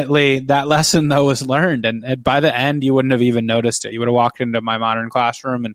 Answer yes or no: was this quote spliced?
no